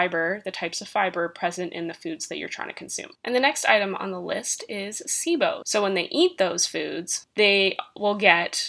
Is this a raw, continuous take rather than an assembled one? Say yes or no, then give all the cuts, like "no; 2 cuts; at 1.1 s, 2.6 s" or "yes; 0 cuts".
no; 2 cuts; at 3.1 s, 5.6 s